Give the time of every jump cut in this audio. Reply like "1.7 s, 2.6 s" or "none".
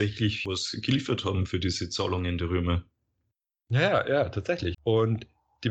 4.7 s